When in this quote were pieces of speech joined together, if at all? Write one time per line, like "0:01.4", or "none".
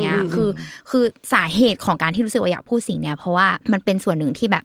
0:03.6